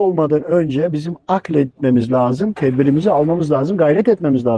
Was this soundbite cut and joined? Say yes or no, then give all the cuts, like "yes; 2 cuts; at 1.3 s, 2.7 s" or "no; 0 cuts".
no; 0 cuts